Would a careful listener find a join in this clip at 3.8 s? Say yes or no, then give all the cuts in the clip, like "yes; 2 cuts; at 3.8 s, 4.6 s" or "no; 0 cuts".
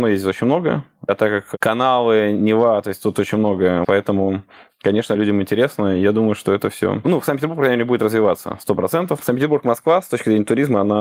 yes; 1 cut; at 3.8 s